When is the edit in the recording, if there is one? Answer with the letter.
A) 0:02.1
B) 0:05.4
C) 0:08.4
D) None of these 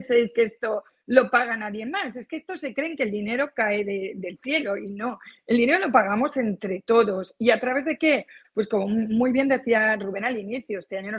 C